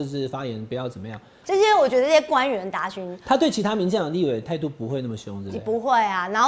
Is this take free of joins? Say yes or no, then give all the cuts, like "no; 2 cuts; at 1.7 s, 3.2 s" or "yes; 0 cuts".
no; 1 cut; at 1.4 s